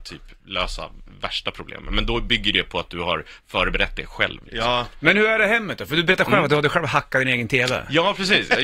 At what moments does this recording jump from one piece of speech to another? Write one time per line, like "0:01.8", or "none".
none